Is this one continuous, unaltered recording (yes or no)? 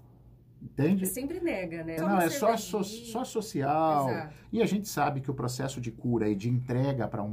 no